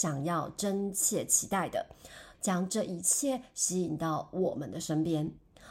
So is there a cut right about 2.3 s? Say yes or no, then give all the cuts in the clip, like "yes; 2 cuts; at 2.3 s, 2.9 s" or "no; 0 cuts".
yes; 1 cut; at 2.3 s